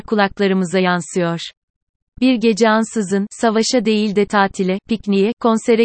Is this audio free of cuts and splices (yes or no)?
yes